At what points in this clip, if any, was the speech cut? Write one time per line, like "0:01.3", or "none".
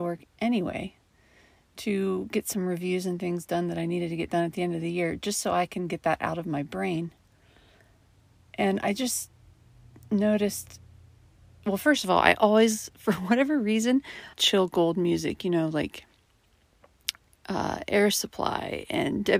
0:14.3